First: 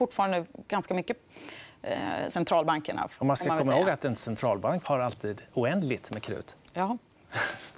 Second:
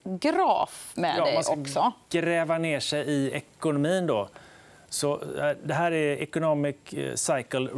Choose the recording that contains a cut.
first; 2 cuts; at 2.3 s, 4.8 s

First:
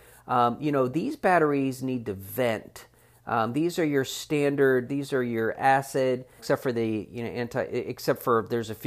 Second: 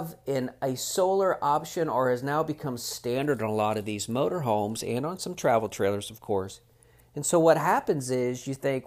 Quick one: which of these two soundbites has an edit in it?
first; 1 cut; at 6.4 s

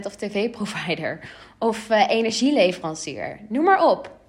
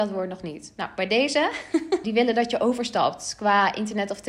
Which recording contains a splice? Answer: second; 1 cut; at 2.0 s

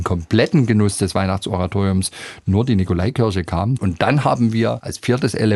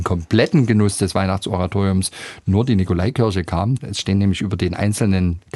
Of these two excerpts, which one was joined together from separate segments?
first; 1 cut; at 3.8 s

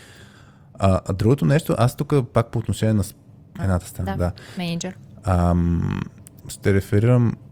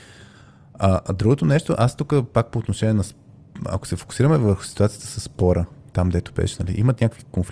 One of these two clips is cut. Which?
first; 2 cuts; at 3.6 s, 6.4 s

